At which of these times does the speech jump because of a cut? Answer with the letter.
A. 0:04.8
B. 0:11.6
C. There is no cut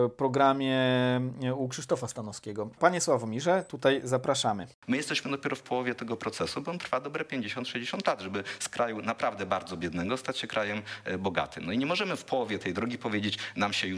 A